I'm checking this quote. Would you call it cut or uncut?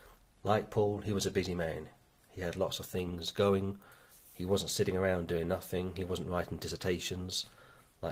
cut